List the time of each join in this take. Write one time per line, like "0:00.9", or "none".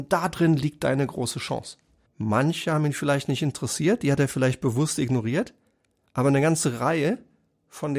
0:02.1